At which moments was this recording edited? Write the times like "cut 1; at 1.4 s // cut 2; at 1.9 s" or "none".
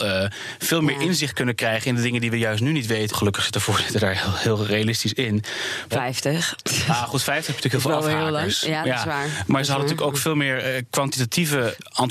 cut 1; at 3.1 s // cut 2; at 5.9 s